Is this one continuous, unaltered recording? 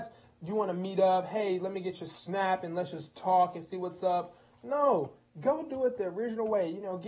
yes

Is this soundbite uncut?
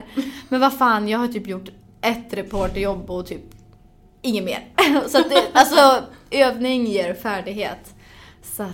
yes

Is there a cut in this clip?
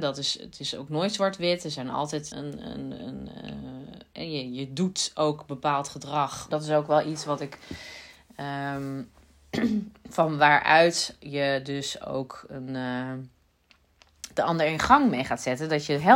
yes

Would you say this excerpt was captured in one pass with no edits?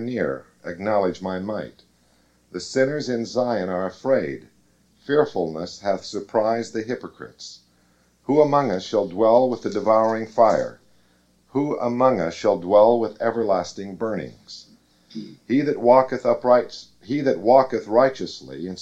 yes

